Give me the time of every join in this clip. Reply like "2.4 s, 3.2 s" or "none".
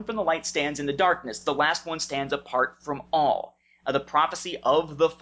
none